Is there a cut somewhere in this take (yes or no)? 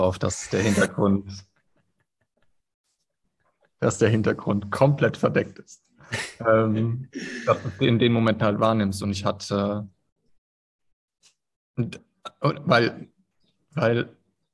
no